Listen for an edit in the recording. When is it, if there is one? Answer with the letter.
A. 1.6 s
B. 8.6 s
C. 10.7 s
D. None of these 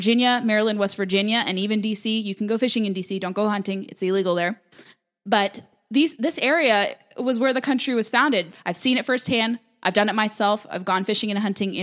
B